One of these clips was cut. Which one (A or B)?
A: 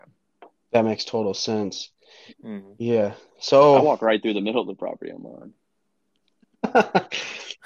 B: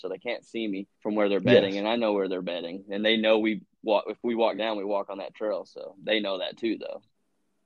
B